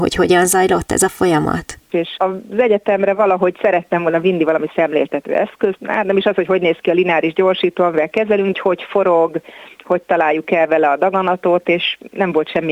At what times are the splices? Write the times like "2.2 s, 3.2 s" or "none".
1.9 s, 5.8 s, 8.5 s